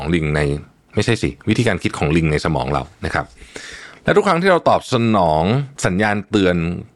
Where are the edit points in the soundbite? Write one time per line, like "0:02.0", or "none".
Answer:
0:05.8